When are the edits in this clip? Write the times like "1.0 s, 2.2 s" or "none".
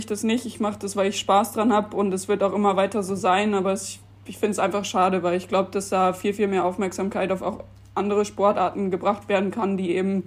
none